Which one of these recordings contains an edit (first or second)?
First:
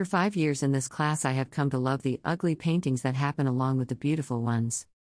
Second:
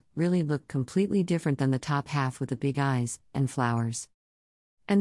second